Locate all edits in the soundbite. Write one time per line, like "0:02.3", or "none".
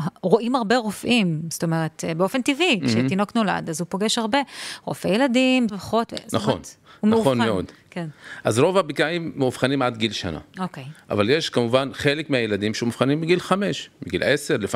0:05.7